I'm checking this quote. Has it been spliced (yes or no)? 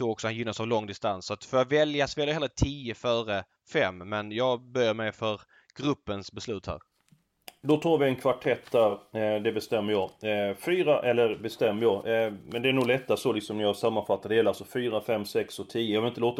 no